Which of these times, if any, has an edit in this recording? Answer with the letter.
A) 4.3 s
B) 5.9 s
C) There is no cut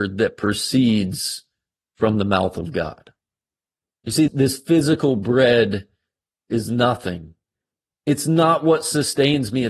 A